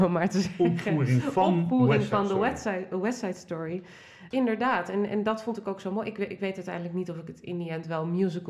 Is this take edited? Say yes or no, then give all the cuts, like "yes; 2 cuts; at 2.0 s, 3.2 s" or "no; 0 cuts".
yes; 1 cut; at 4.3 s